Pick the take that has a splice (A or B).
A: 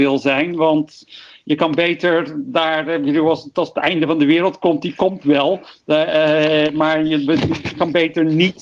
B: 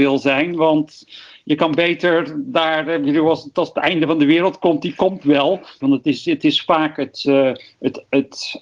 B